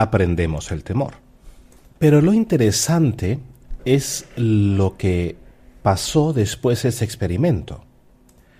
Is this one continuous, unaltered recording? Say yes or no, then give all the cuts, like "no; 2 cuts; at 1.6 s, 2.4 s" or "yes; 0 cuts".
yes; 0 cuts